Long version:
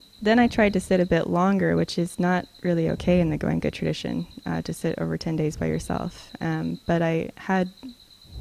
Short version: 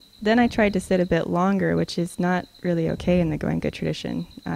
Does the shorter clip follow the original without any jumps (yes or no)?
yes